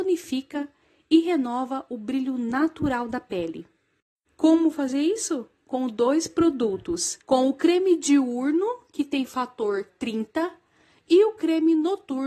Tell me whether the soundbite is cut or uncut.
cut